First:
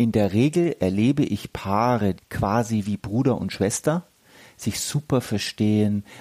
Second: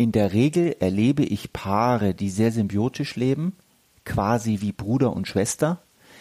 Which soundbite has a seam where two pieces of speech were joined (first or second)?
first